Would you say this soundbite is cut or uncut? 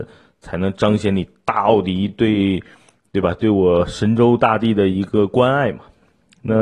uncut